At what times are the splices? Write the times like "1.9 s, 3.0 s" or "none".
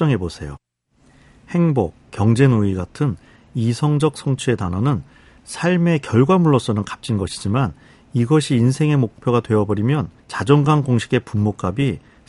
2.0 s, 10.2 s